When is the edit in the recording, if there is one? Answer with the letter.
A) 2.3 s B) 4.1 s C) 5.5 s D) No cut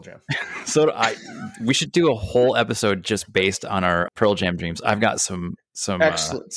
B